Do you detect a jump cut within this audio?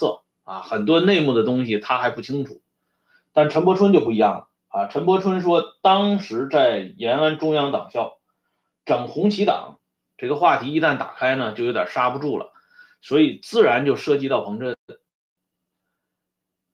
yes; 1 cut; at 10.1 s

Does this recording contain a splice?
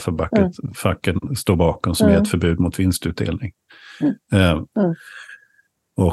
yes; 1 cut; at 4.7 s

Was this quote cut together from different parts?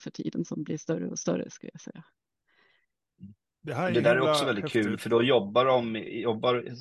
no; 0 cuts

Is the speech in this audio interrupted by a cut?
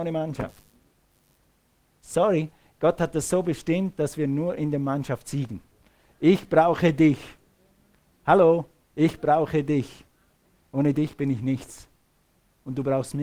no; 0 cuts

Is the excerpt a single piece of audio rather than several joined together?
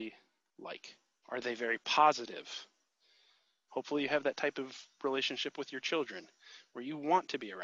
no; 2 cuts; at 1.2 s, 3.7 s

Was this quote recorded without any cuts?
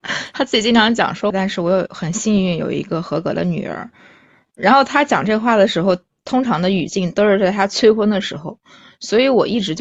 no; 1 cut; at 1.3 s

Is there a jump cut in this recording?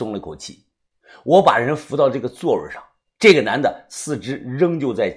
no; 0 cuts

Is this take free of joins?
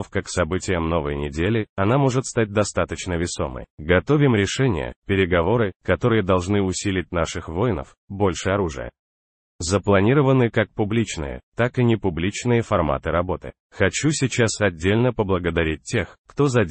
no; 3 cuts; at 3.7 s, 8.0 s, 13.6 s

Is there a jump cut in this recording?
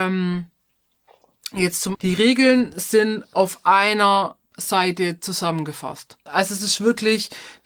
yes; 2 cuts; at 1.9 s, 6.3 s

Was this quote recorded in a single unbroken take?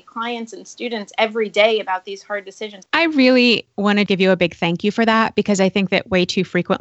no; 2 cuts; at 2.8 s, 4.1 s

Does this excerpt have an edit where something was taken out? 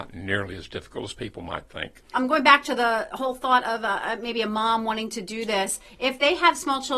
yes; 1 cut; at 2.1 s

